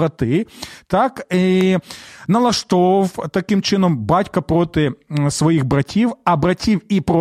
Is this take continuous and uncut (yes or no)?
yes